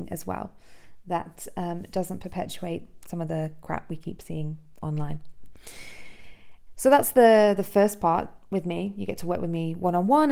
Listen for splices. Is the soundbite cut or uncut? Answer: uncut